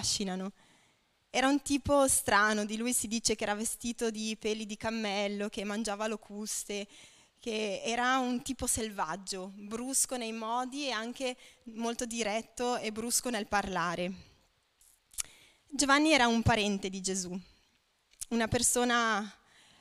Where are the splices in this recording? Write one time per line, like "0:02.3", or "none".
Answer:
none